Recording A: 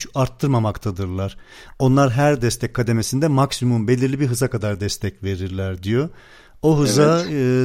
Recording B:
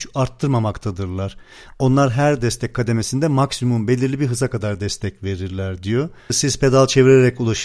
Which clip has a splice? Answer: B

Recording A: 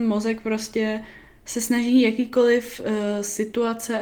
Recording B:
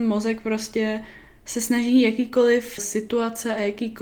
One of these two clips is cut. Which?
B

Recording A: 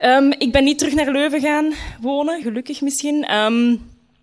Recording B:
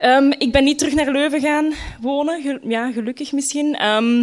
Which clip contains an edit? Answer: A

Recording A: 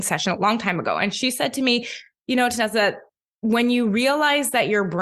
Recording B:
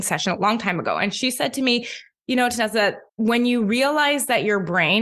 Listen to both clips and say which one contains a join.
B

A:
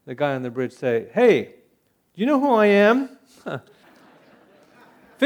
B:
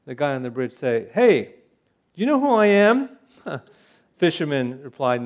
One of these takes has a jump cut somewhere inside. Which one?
A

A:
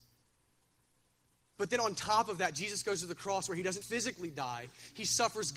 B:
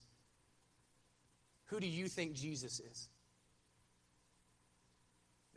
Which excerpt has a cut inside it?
A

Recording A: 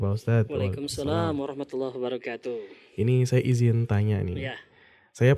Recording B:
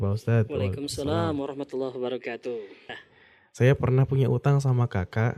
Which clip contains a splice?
B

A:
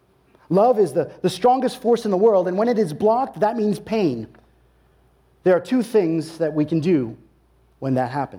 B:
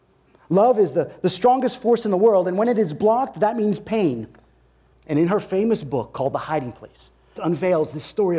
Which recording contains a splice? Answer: B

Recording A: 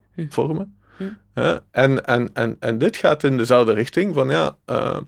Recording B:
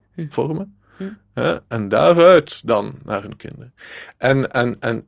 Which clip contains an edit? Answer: A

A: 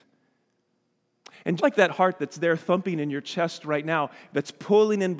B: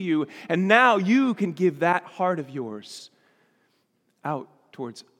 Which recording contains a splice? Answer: A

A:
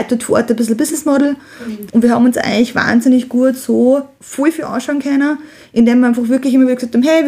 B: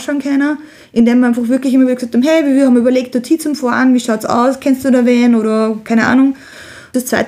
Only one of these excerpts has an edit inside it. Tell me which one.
A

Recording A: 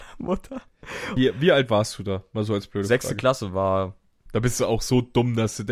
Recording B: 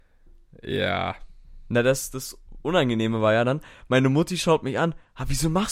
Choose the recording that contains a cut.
A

